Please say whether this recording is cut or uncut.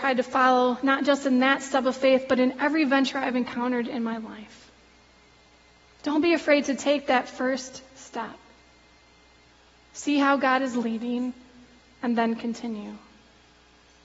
uncut